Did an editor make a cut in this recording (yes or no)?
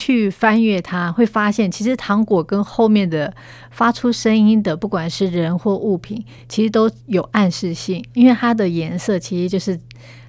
no